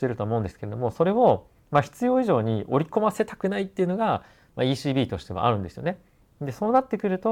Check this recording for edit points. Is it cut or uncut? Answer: uncut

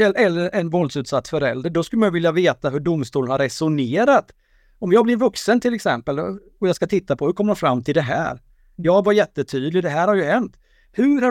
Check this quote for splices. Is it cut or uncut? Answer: uncut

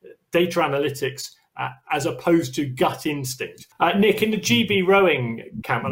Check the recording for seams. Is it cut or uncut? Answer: uncut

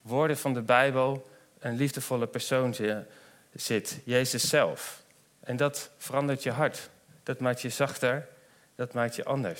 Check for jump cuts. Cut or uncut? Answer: uncut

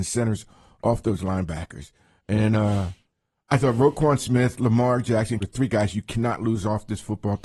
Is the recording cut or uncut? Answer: cut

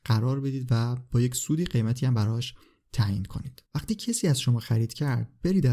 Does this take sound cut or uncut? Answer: cut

